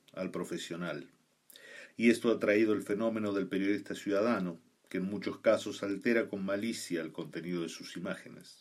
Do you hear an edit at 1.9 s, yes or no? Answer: yes